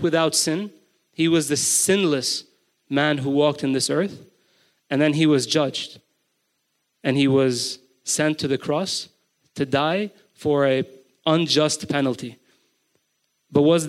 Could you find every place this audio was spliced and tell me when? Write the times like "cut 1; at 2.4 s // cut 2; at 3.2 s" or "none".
none

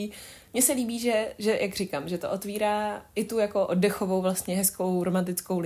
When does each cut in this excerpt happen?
none

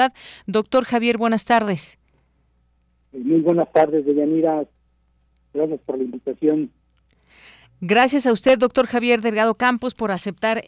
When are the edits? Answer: none

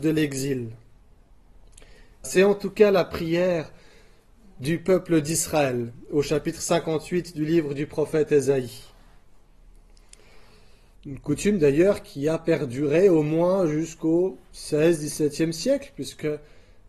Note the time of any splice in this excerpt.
cut 1; at 2.2 s // cut 2; at 10.9 s

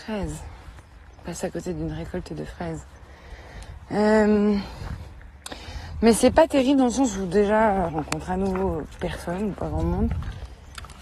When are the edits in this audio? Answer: cut 1; at 7.9 s

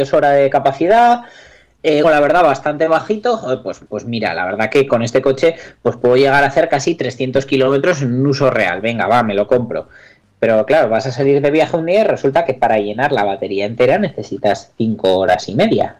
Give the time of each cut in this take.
cut 1; at 2.0 s

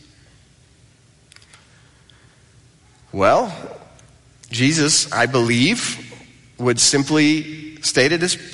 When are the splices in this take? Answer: none

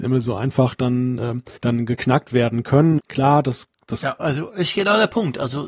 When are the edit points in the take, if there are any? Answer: cut 1; at 1.6 s // cut 2; at 3.0 s // cut 3; at 4.2 s

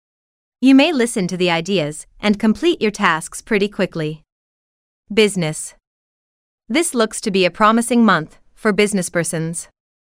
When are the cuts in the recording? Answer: cut 1; at 2.1 s

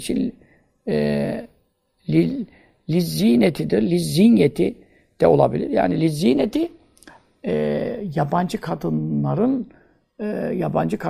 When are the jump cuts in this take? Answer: none

